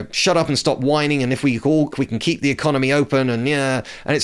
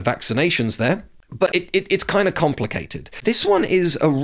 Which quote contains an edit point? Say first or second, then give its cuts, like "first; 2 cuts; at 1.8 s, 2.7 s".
first; 1 cut; at 1.9 s